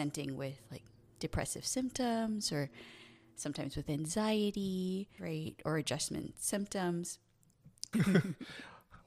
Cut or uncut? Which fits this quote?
cut